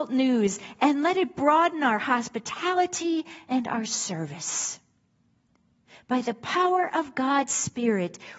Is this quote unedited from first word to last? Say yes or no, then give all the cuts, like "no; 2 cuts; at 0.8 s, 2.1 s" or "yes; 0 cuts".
yes; 0 cuts